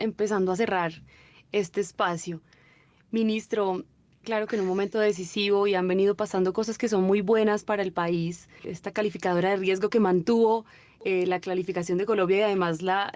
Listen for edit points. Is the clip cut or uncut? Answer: cut